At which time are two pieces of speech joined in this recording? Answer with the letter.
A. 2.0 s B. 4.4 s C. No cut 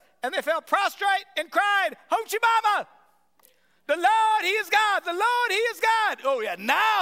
C